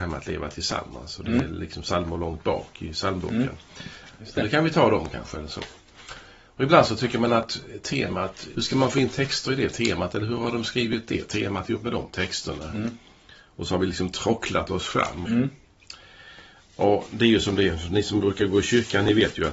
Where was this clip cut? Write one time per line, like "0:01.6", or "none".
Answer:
0:08.5
0:15.2